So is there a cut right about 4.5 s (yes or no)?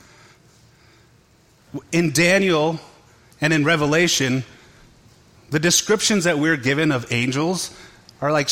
no